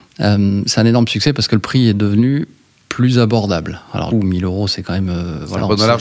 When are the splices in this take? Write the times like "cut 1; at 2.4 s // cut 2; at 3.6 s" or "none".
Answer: cut 1; at 4.1 s